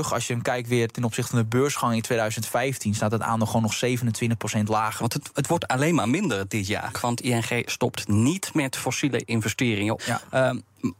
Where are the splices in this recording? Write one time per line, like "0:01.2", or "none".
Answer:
0:05.0
0:06.9
0:10.0